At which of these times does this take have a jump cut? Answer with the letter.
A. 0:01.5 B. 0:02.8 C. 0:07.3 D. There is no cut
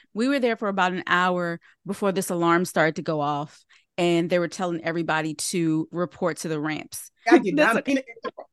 C